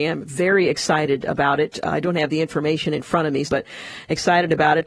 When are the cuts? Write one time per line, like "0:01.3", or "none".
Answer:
0:03.5